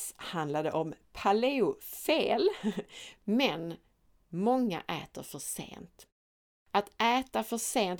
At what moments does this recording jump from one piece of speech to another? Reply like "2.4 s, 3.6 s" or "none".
3.2 s